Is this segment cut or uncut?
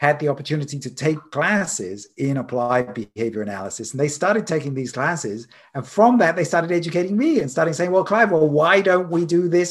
uncut